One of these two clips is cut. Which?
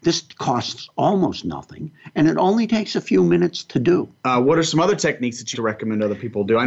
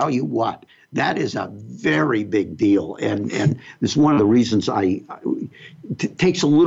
first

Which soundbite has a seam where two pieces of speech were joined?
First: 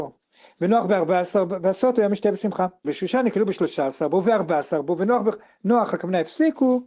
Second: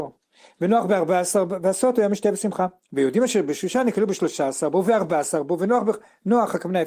first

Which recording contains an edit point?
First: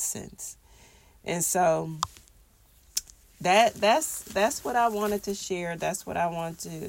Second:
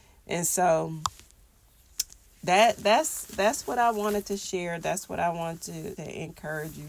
second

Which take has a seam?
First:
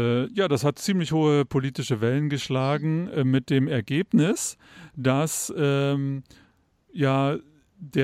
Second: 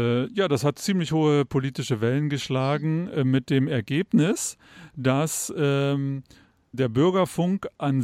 second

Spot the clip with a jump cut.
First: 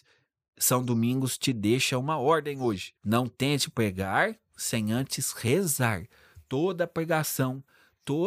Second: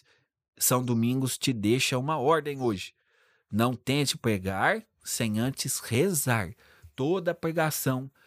first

